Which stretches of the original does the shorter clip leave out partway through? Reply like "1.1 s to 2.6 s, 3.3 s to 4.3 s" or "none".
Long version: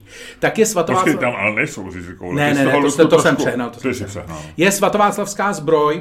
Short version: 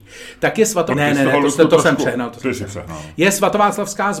0.9 s to 2.3 s